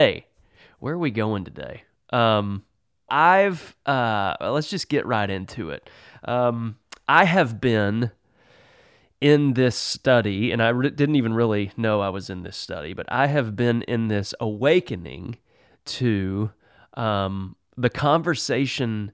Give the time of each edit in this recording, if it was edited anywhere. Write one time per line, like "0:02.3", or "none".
0:03.1

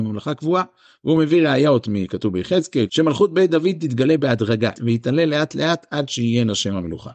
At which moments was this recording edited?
0:02.9
0:04.8

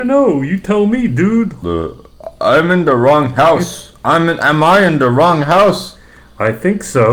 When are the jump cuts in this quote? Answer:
0:01.6

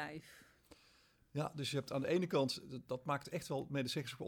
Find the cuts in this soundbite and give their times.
none

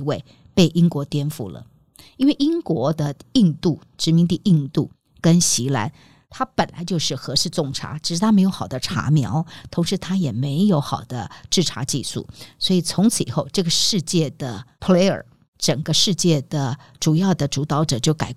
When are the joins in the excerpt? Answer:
none

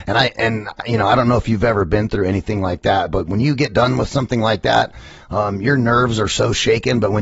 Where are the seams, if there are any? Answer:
none

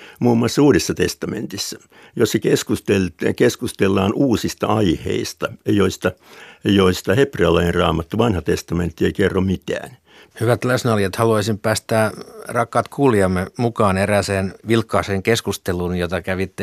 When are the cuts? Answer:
0:10.3
0:14.6

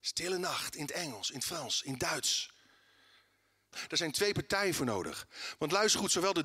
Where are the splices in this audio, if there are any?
0:03.7

